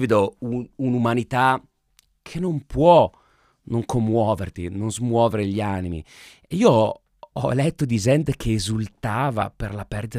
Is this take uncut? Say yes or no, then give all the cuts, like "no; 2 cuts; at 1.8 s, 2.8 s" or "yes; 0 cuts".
yes; 0 cuts